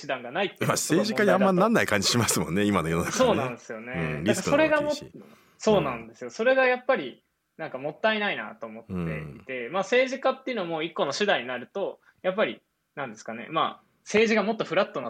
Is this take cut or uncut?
uncut